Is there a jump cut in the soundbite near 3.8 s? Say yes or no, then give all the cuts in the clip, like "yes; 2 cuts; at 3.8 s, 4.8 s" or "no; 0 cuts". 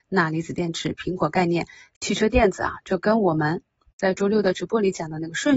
no; 0 cuts